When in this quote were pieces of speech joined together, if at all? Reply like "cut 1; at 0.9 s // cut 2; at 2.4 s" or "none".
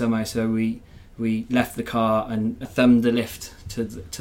cut 1; at 2.6 s